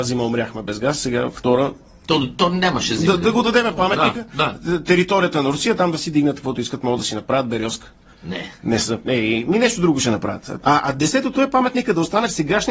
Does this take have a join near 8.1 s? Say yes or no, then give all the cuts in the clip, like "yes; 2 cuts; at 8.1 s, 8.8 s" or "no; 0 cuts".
yes; 2 cuts; at 8.1 s, 10.6 s